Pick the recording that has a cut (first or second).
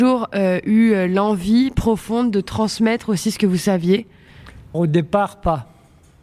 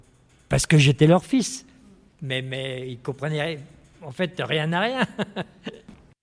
first